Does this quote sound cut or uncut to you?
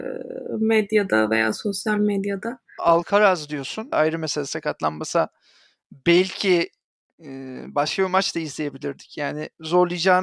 cut